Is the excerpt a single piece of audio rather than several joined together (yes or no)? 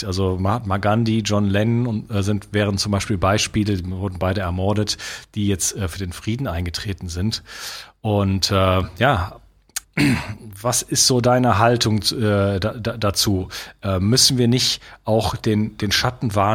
no